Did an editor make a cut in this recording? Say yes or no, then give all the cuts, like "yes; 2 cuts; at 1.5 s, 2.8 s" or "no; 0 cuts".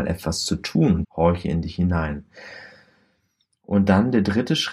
yes; 1 cut; at 1.0 s